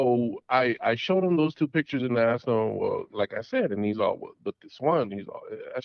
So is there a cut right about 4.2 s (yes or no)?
no